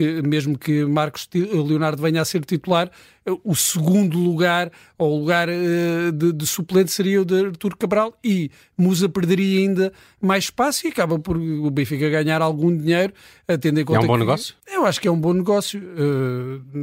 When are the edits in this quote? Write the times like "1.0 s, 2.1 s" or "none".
14.6 s